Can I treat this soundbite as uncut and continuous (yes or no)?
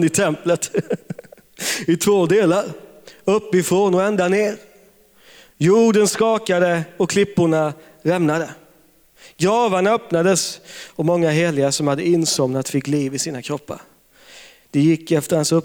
yes